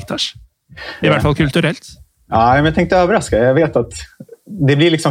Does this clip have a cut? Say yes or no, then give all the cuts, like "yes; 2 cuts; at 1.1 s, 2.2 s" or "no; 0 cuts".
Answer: yes; 1 cut; at 1.0 s